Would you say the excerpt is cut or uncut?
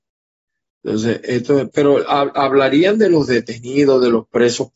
uncut